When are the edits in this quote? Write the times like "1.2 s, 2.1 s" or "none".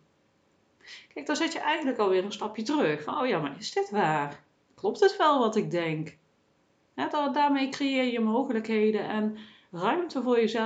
6.9 s